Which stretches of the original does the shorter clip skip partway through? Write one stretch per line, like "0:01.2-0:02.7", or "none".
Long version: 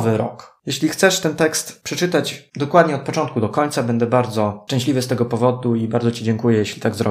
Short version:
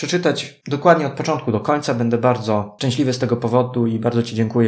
none